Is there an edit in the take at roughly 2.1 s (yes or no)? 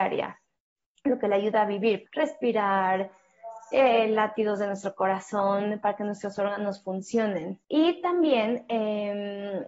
yes